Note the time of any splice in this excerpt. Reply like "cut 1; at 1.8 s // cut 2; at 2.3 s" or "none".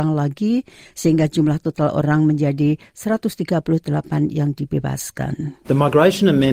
cut 1; at 5.6 s